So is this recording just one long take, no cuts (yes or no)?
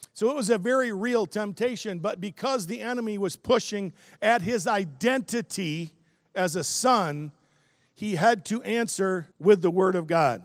no